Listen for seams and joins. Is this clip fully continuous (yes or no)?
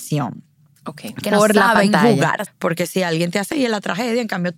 no